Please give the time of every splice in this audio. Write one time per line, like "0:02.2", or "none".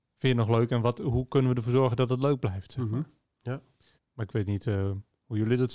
0:04.0